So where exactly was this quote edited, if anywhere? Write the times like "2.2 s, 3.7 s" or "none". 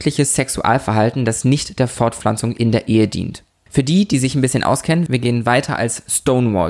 3.7 s, 5.1 s

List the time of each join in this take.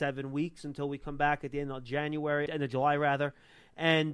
2.5 s

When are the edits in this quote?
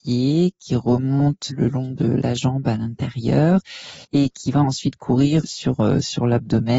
1.5 s, 4.0 s, 5.4 s

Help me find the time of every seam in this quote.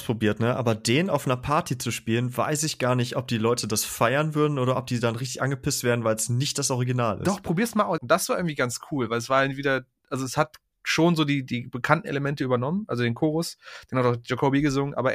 8.0 s

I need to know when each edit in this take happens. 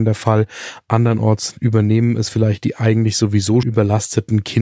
3.6 s

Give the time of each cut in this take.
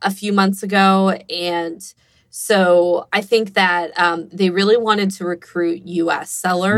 4.3 s

